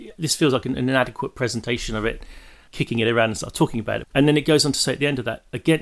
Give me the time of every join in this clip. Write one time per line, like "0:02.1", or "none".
0:02.7
0:04.0